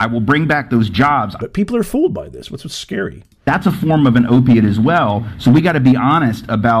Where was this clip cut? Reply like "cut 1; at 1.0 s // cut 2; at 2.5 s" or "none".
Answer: cut 1; at 1.4 s

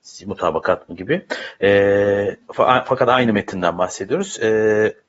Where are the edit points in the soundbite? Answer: cut 1; at 2.4 s

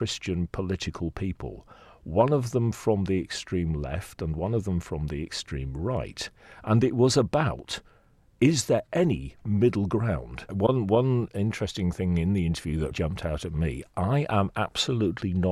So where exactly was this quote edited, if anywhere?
cut 1; at 10.5 s // cut 2; at 12.9 s

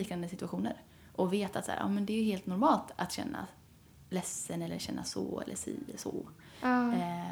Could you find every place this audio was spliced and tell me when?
none

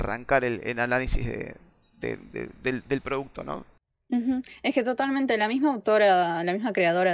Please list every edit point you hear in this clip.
none

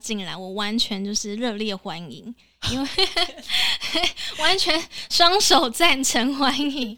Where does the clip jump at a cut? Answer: none

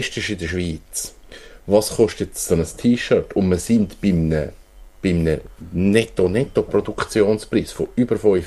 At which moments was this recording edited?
none

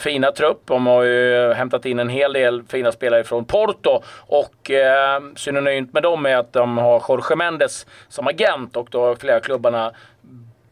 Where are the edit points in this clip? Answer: none

